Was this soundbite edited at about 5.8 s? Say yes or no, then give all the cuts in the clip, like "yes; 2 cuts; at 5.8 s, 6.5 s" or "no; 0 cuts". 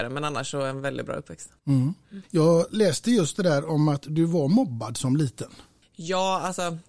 no; 0 cuts